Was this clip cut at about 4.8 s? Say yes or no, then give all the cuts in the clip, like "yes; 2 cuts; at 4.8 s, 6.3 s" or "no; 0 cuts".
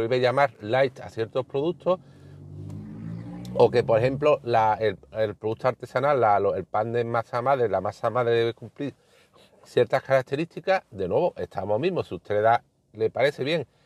no; 0 cuts